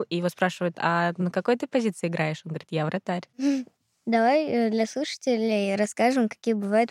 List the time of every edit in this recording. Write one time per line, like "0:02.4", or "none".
none